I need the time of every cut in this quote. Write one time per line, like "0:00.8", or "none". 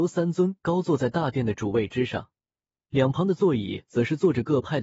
none